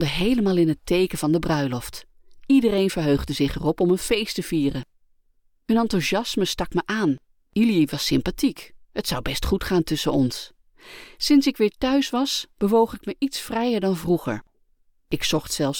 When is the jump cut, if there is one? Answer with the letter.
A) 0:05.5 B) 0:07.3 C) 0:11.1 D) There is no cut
D